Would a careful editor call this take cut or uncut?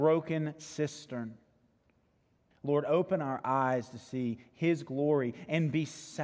cut